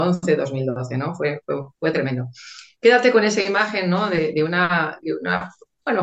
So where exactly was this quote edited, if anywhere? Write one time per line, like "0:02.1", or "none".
0:05.0